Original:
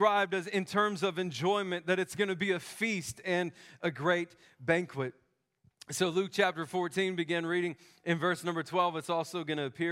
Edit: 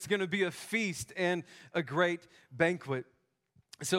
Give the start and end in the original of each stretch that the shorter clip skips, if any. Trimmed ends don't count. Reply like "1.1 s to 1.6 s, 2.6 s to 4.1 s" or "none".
none